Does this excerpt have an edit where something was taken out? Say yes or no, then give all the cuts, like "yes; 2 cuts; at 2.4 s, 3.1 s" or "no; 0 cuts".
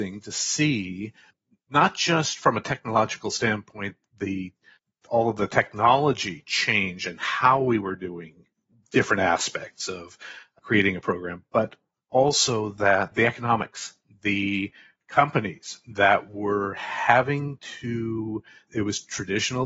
no; 0 cuts